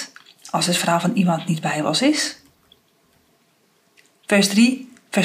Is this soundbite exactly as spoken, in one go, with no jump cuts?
yes; 0 cuts

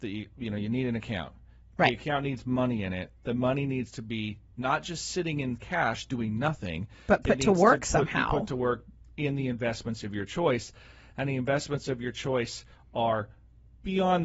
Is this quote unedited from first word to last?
yes; 0 cuts

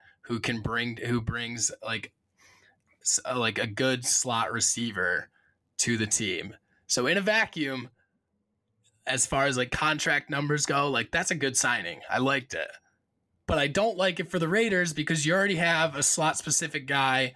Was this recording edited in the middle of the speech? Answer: no; 0 cuts

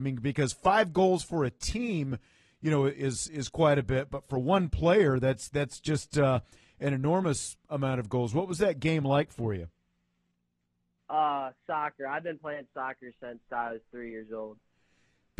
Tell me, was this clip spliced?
yes; 1 cut; at 11.0 s

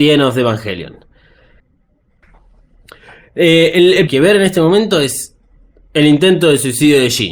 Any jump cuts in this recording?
yes; 1 cut; at 4.1 s

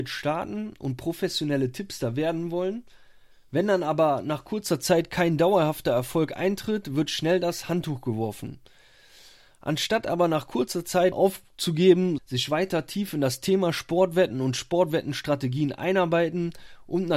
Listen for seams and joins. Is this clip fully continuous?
no; 2 cuts; at 11.1 s, 12.2 s

